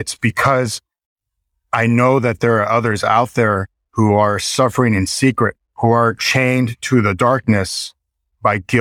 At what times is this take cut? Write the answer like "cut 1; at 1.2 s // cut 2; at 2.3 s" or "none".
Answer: cut 1; at 5.7 s